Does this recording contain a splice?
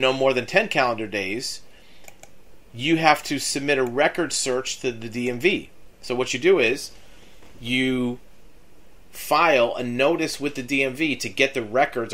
no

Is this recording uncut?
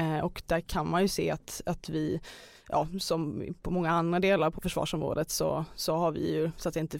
yes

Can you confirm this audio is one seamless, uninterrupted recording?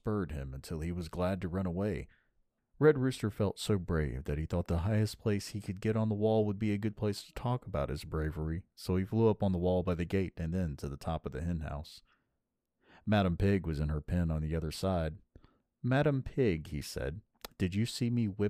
no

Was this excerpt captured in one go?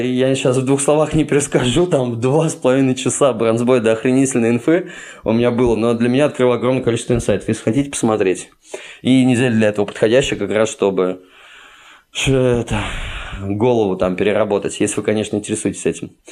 yes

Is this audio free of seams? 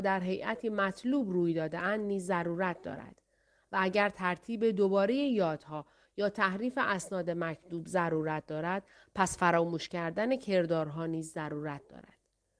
yes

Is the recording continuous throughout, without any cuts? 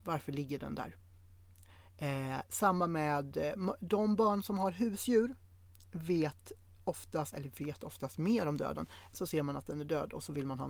no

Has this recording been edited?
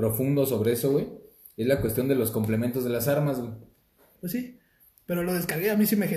yes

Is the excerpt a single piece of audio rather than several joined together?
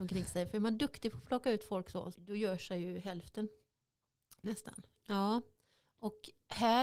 no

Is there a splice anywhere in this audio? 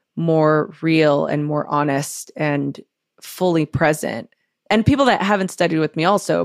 yes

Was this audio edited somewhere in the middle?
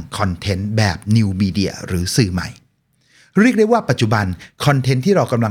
no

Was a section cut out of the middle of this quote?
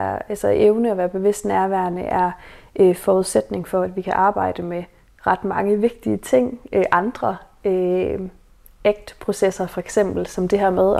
no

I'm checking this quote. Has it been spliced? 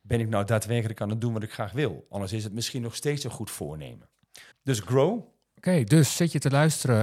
yes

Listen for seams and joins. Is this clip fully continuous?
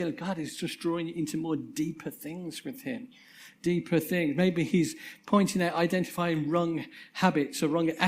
yes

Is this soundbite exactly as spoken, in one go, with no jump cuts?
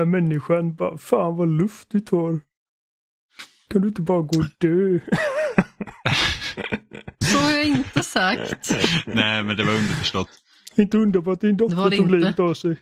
yes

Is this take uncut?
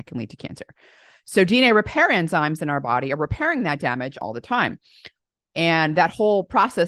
no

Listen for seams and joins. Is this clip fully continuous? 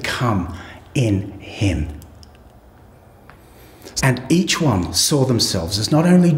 no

